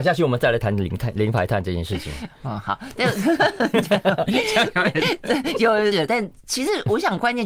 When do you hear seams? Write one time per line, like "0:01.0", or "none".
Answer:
0:05.9